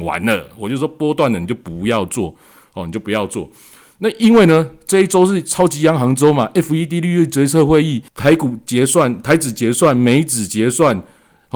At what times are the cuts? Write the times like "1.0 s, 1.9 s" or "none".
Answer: 8.1 s